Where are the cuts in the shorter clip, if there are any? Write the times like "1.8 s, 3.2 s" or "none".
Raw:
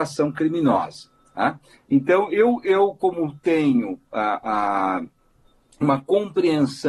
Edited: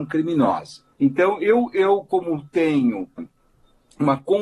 0.9 s, 3.2 s